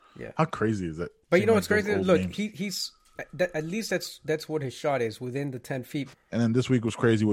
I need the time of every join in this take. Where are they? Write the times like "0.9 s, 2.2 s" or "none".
6.1 s